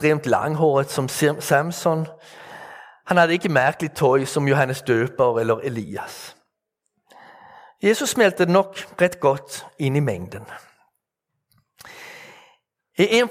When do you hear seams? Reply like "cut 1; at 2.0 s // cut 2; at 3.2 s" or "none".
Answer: none